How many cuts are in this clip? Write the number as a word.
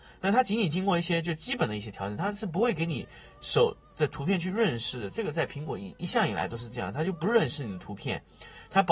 zero